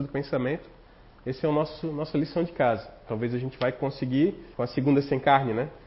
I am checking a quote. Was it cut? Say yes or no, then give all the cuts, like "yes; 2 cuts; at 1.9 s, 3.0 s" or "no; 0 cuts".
yes; 2 cuts; at 3.1 s, 4.5 s